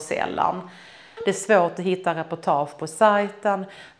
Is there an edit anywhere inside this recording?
yes; 1 cut; at 1.2 s

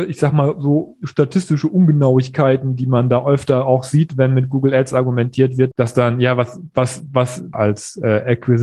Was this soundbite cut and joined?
yes; 2 cuts; at 5.7 s, 7.5 s

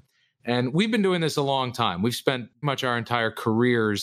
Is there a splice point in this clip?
yes; 1 cut; at 2.6 s

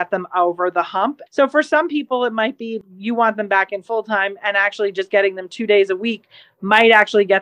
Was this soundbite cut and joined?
yes; 1 cut; at 1.3 s

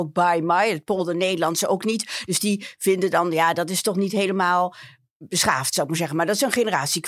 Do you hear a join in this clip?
no; 0 cuts

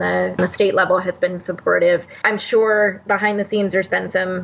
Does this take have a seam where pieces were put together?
yes; 1 cut; at 1.4 s

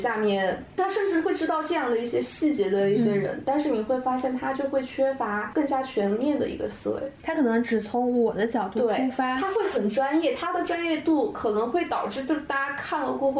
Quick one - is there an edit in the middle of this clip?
no; 0 cuts

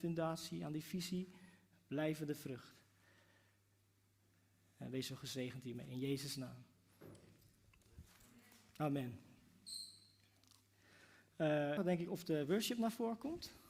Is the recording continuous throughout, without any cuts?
no; 2 cuts; at 1.7 s, 11.8 s

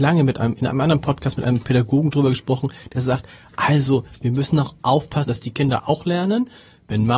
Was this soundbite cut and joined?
yes; 1 cut; at 5.3 s

